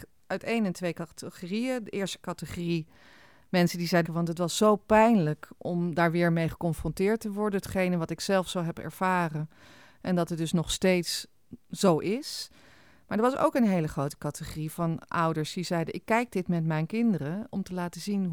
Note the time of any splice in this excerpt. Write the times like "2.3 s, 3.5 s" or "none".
4.0 s